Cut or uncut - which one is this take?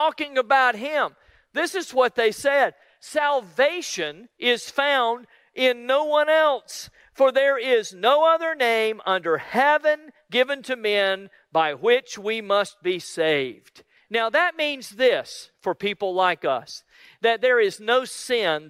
cut